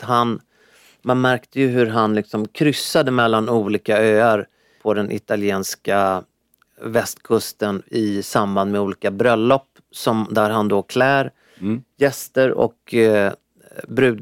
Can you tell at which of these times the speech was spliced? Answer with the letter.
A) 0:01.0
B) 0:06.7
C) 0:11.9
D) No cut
D